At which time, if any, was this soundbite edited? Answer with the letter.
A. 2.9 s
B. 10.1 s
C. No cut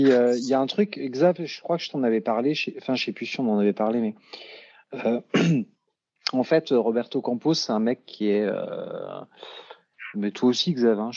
B